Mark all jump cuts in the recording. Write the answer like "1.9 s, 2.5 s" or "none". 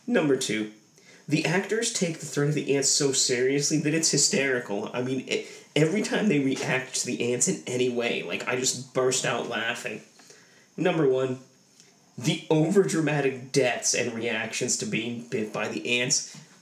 none